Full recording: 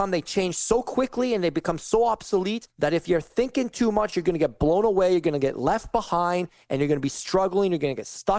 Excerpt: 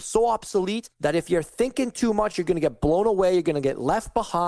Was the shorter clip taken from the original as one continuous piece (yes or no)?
yes